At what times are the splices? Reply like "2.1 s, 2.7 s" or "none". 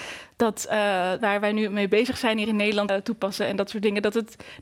1.2 s, 2.9 s